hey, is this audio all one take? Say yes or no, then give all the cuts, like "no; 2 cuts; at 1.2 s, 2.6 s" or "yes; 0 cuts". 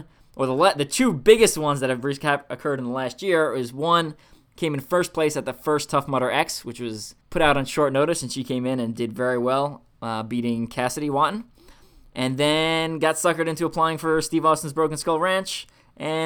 no; 1 cut; at 7.2 s